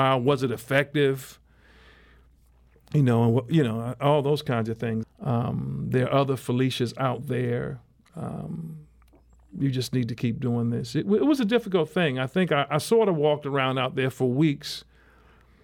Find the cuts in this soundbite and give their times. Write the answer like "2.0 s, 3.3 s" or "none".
5.0 s